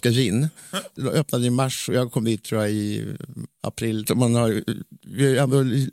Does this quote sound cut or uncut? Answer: cut